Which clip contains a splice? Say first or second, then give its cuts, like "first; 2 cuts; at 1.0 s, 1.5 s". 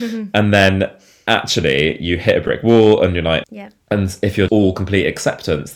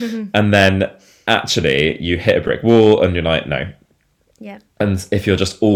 first; 2 cuts; at 3.4 s, 4.5 s